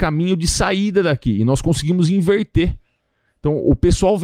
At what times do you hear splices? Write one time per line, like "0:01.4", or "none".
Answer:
none

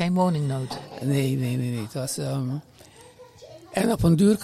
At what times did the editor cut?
none

